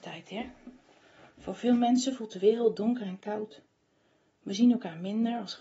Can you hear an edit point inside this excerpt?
no; 0 cuts

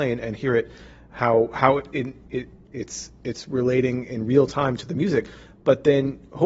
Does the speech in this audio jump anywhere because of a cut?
no; 0 cuts

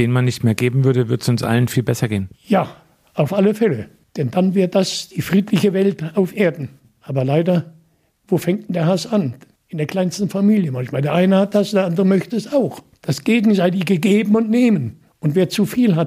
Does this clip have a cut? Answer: no; 0 cuts

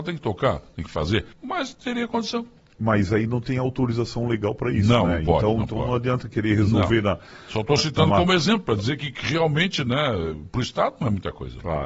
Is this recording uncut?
no; 1 cut; at 1.3 s

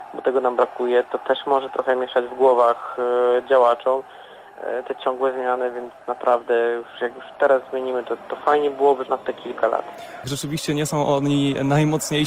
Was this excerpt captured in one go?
no; 2 cuts; at 9.1 s, 10.2 s

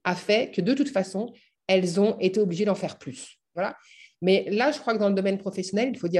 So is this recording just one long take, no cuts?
no; 1 cut; at 3.5 s

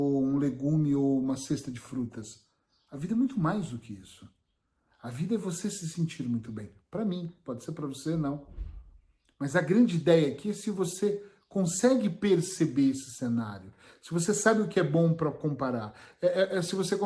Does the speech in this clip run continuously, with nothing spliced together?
yes; 0 cuts

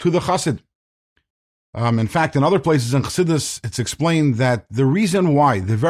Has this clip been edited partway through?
no; 0 cuts

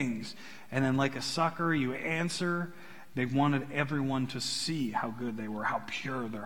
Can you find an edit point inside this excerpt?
yes; 1 cut; at 3.1 s

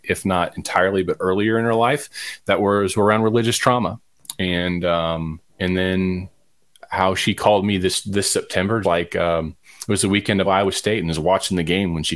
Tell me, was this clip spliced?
yes; 3 cuts; at 5.5 s, 8.8 s, 10.4 s

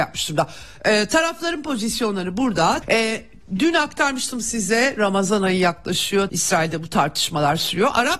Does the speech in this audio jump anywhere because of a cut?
yes; 2 cuts; at 2.8 s, 6.3 s

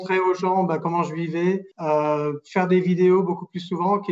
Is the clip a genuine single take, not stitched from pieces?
no; 1 cut; at 1.7 s

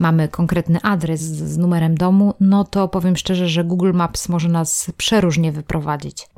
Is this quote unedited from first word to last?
yes; 0 cuts

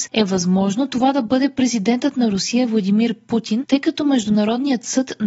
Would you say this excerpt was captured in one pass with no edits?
yes; 0 cuts

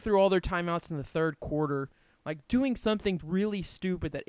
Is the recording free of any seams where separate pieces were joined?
no; 1 cut; at 3.2 s

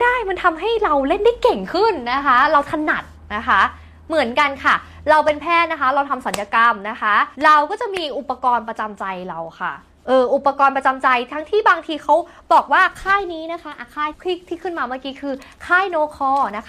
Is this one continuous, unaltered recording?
no; 2 cuts; at 7.3 s, 14.1 s

